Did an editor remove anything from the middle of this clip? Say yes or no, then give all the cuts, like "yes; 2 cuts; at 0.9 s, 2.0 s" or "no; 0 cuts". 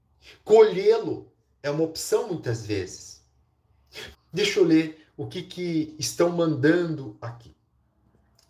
yes; 1 cut; at 4.1 s